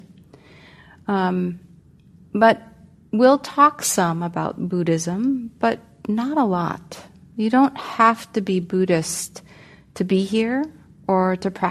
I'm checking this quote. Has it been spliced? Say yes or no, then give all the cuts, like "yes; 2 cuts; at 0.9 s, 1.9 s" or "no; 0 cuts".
no; 0 cuts